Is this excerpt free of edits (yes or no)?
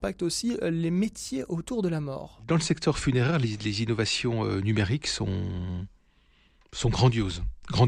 yes